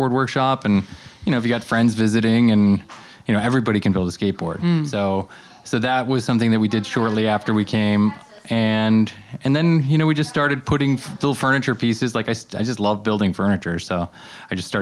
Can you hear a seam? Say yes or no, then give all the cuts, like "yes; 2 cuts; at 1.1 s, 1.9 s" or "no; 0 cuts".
no; 0 cuts